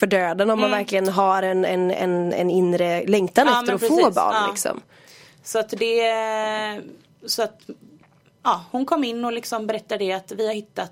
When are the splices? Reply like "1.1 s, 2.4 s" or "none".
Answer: none

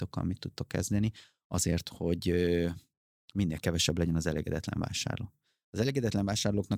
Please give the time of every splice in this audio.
none

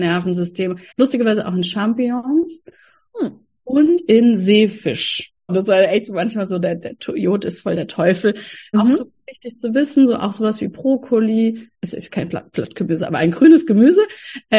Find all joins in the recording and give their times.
0.9 s, 5.5 s, 8.7 s

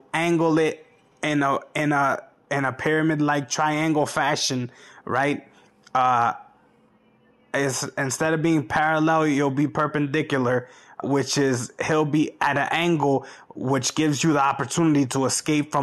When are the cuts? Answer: 11.0 s

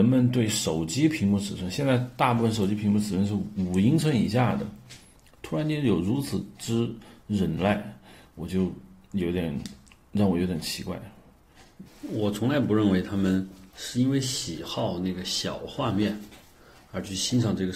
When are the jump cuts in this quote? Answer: 11.8 s, 13.7 s

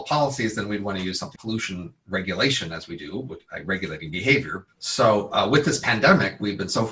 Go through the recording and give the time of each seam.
1.4 s, 4.7 s

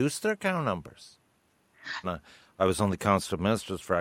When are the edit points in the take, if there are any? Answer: 2.0 s

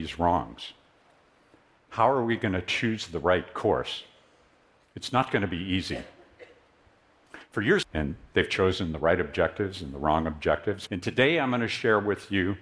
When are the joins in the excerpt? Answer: 7.8 s, 10.9 s

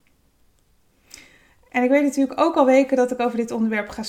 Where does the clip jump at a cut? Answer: none

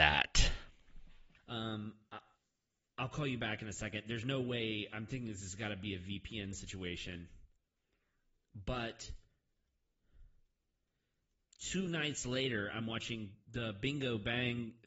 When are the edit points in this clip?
1.4 s

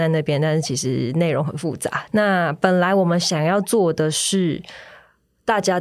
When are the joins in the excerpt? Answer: 2.1 s

